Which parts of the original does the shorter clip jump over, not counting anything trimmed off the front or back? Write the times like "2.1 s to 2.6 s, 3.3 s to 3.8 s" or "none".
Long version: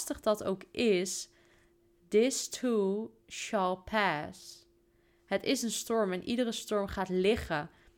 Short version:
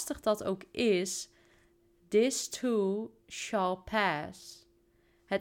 none